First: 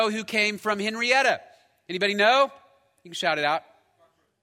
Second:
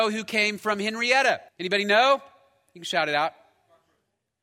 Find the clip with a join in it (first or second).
second